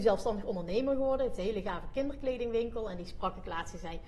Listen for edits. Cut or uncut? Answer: uncut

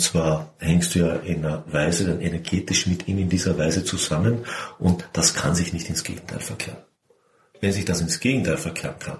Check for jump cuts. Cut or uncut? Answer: uncut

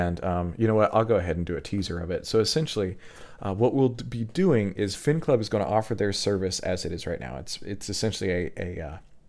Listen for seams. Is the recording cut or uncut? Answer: uncut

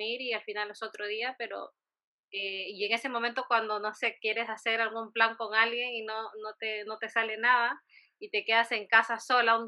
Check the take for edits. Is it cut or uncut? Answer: uncut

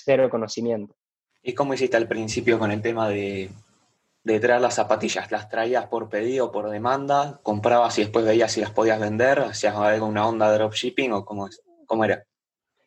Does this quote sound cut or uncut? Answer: uncut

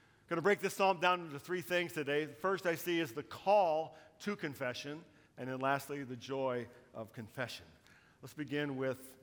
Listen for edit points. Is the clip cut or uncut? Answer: cut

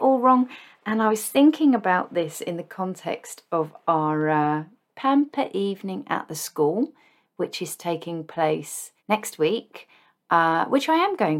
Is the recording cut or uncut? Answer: cut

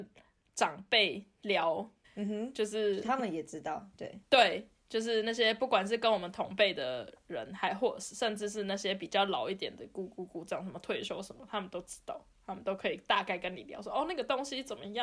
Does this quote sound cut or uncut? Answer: cut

